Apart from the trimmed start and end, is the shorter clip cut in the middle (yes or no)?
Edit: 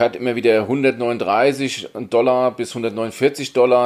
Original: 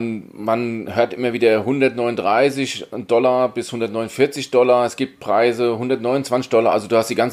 no